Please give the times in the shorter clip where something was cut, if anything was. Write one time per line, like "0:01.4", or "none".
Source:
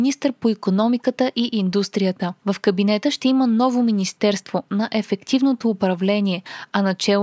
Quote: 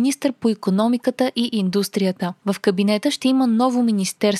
none